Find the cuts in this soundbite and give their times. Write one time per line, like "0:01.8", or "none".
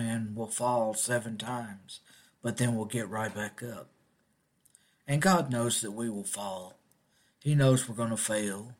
none

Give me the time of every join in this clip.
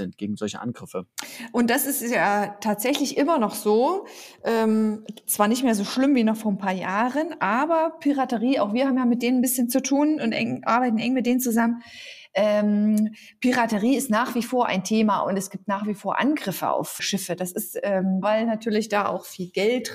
0:17.0
0:18.2

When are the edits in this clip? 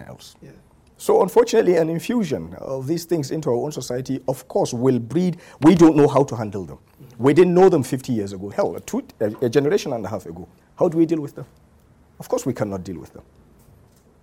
0:08.5
0:10.6

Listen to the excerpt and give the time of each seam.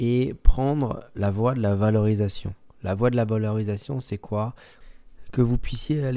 none

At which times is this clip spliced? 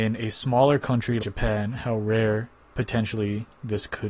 0:01.2

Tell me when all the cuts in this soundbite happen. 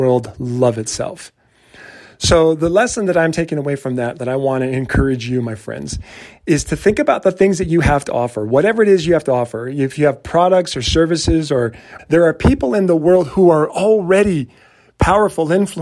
0:12.0

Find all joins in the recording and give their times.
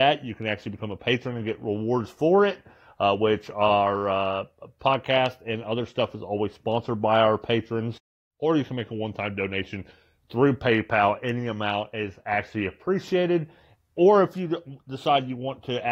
none

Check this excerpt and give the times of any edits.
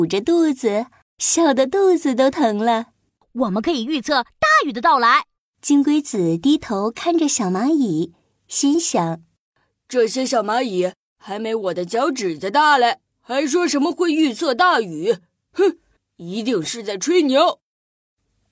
0:01.0

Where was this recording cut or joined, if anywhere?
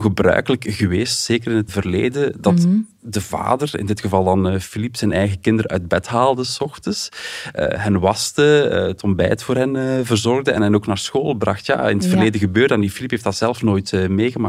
0:01.7

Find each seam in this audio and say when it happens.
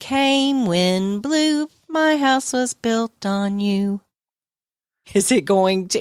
0:05.0

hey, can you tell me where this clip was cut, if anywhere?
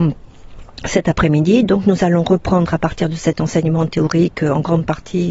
none

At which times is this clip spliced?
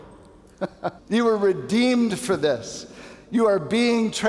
0:01.0

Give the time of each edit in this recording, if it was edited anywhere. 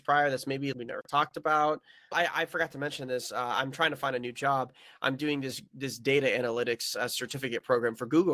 none

